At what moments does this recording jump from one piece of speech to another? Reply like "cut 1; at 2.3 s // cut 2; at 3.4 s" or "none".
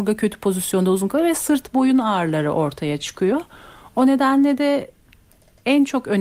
none